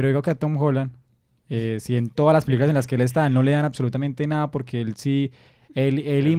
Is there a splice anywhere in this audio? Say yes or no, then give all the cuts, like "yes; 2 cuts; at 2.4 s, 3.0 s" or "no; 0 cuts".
no; 0 cuts